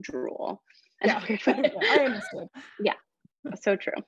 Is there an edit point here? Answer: yes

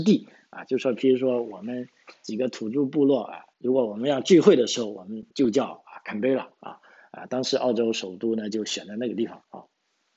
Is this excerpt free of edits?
no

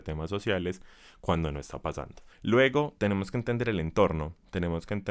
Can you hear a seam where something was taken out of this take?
yes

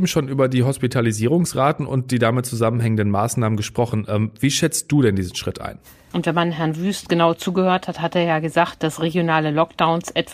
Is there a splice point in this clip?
yes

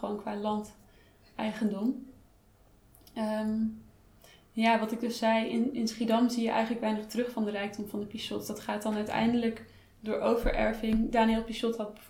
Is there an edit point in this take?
no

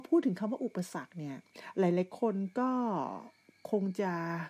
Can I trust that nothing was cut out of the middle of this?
yes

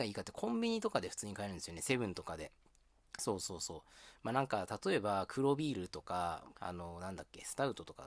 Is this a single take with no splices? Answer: no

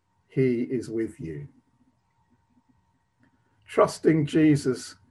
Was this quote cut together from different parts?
yes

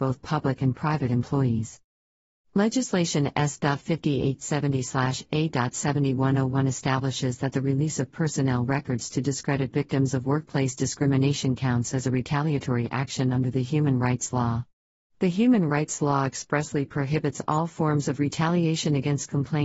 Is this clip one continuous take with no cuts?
yes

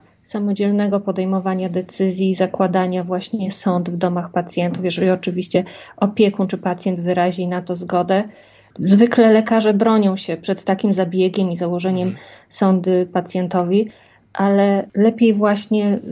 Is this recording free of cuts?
yes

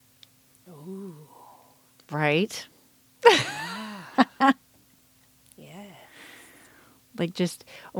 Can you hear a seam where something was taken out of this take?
no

